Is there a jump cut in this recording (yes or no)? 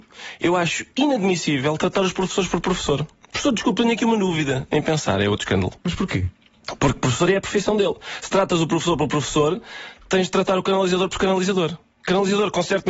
no